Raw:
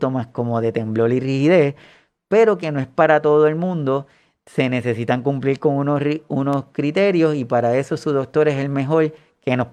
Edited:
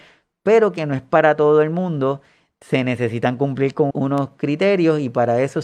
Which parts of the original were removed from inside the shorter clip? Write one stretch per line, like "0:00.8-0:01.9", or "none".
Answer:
0:05.8-0:06.3